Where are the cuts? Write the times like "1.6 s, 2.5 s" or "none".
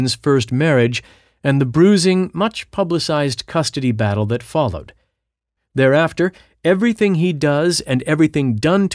5.6 s